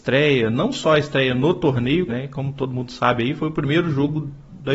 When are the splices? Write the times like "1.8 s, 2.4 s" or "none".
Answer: 2.1 s